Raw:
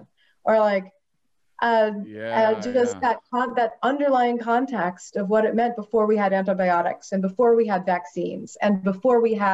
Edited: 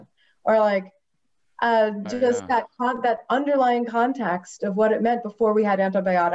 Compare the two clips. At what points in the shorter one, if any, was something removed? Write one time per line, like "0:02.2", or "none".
0:02.0